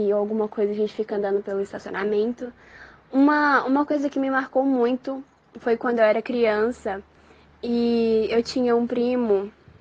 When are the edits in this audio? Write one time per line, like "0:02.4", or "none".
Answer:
none